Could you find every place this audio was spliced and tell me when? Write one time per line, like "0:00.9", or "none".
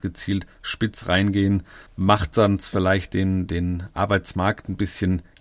none